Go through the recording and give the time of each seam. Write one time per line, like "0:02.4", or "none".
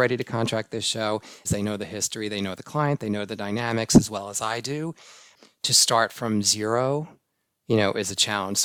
0:01.4

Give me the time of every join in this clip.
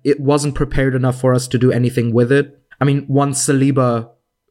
0:02.7

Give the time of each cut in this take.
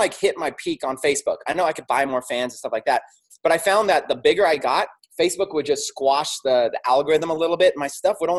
none

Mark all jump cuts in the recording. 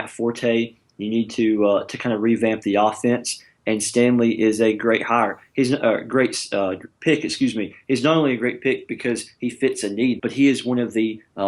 0:10.2

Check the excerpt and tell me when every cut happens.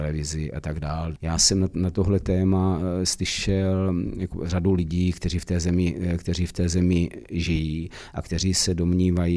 0:01.2

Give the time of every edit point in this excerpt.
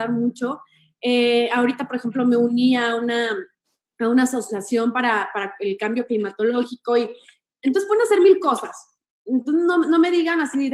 none

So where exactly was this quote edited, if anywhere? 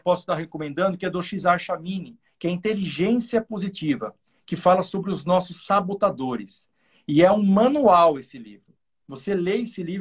0:09.0

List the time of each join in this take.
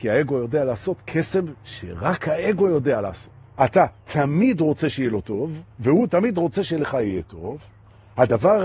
0:03.6
0:05.7

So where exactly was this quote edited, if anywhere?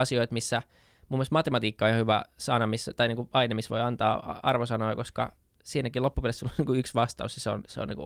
none

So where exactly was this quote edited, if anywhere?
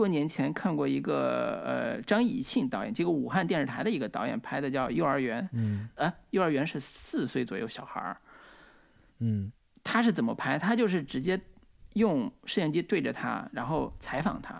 0:06.0

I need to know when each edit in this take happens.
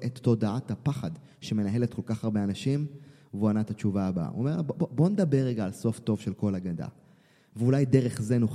none

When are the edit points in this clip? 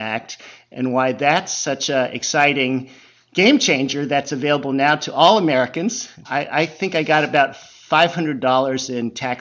0:06.2

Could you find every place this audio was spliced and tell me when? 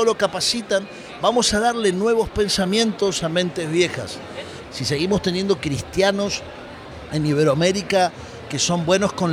0:04.6

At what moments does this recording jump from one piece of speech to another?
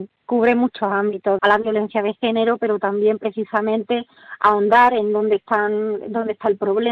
0:01.4

